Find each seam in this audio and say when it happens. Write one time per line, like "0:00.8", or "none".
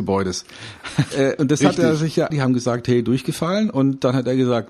0:01.1
0:02.3